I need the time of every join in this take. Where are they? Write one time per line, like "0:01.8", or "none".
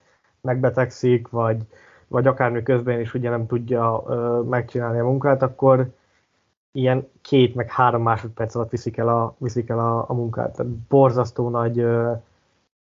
none